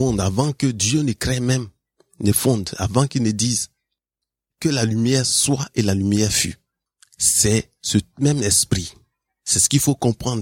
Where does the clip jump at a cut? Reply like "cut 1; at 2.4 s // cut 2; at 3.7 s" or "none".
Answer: none

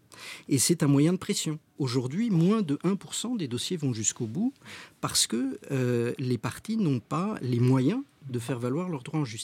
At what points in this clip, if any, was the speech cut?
cut 1; at 1.8 s

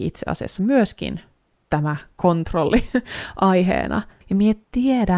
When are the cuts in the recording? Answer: cut 1; at 4.2 s

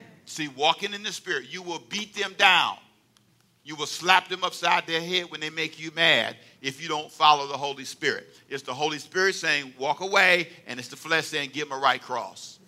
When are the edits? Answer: none

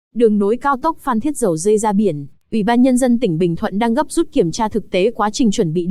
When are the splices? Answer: none

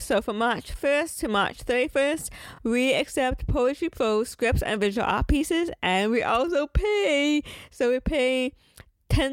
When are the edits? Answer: none

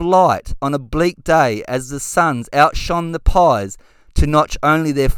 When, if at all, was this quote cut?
none

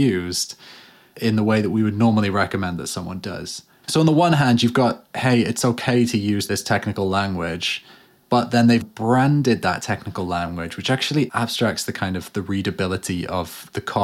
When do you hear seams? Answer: cut 1; at 3.8 s // cut 2; at 8.8 s

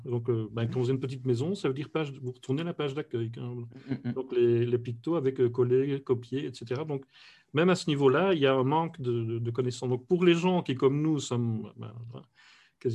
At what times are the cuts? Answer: none

